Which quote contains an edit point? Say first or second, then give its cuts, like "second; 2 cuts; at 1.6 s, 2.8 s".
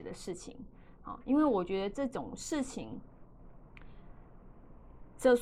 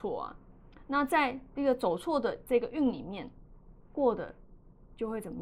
second; 1 cut; at 3.8 s